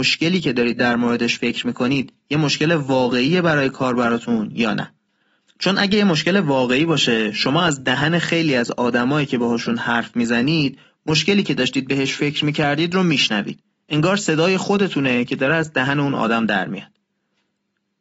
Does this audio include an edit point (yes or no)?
no